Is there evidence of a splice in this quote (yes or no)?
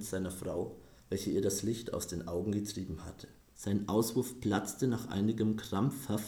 yes